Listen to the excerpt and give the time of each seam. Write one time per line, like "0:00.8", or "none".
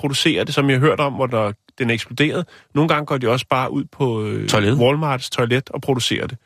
none

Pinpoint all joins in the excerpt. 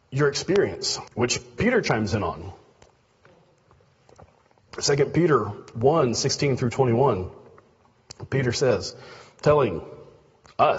0:01.1

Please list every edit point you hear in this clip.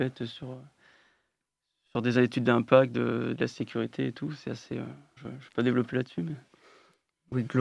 0:05.2

